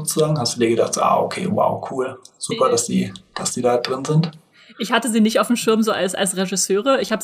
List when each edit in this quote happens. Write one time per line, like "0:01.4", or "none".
none